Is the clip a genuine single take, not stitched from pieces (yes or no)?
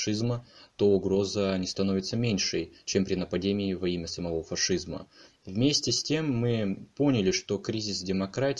no